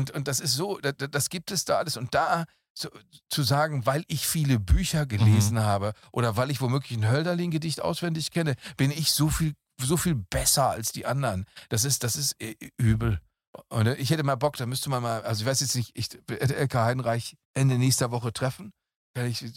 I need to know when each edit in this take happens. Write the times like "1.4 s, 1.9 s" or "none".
17.4 s